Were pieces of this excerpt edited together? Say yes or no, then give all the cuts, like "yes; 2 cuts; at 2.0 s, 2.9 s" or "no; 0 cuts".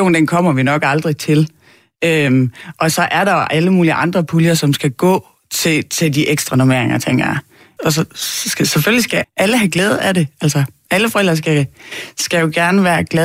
yes; 2 cuts; at 7.8 s, 9.2 s